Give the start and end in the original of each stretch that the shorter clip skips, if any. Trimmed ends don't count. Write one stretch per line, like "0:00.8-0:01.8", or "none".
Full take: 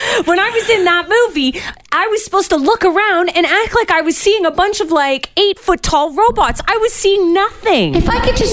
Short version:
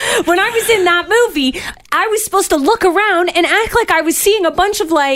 none